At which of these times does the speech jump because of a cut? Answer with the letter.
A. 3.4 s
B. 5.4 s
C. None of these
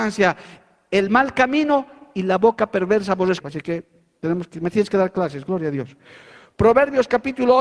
A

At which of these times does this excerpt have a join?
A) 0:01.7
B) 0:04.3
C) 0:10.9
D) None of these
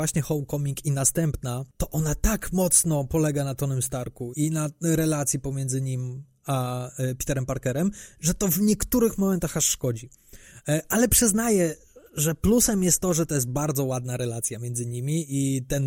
B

